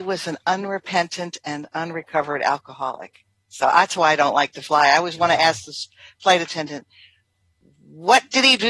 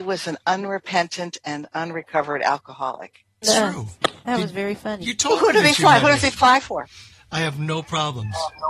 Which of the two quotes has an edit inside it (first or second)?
second